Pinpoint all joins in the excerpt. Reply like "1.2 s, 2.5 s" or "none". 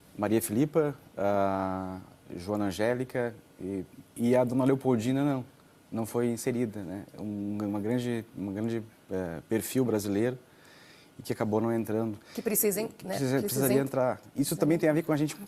none